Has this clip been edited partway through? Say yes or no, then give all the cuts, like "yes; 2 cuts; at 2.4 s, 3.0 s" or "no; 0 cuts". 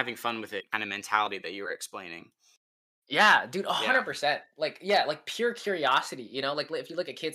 no; 0 cuts